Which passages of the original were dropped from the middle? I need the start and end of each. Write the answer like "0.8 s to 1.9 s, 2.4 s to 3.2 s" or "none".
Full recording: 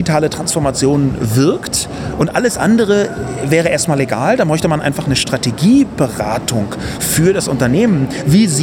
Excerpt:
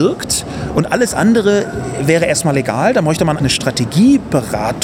4.8 s to 5.0 s